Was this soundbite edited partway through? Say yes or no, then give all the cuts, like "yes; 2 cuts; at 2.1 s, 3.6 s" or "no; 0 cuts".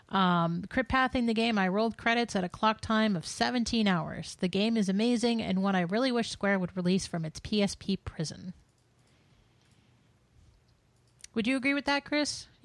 no; 0 cuts